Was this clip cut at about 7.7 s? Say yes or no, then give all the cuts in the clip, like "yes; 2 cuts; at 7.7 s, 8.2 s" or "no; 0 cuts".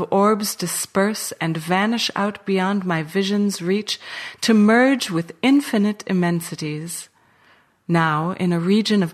no; 0 cuts